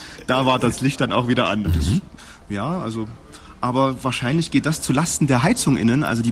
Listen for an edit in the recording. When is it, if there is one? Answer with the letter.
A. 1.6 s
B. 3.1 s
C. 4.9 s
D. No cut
A